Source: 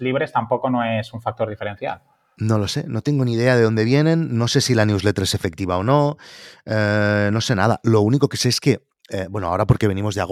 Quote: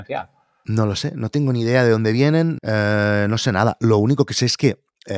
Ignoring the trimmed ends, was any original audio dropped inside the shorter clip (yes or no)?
yes